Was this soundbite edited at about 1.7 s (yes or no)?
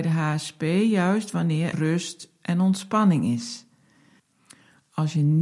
yes